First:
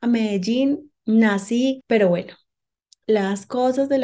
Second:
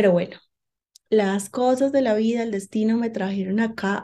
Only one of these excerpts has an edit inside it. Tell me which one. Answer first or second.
first